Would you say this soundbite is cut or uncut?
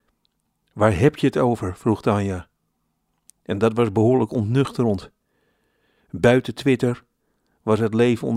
uncut